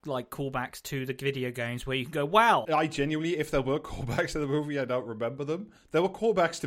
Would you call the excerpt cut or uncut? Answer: cut